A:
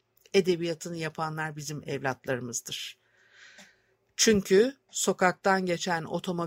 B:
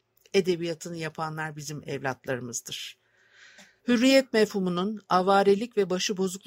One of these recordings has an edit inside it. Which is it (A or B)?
B